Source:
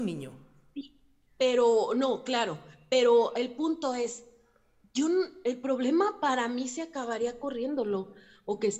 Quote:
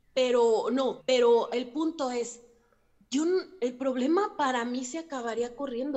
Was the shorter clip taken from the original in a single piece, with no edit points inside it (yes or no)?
no